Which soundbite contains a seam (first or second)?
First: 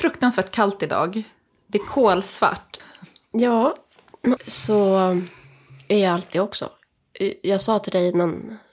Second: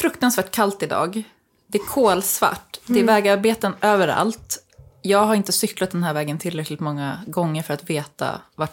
first